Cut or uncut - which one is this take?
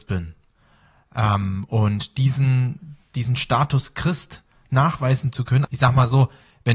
cut